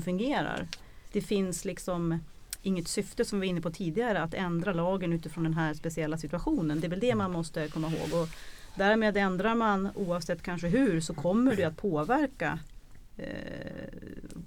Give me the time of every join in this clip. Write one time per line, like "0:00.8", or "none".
0:01.1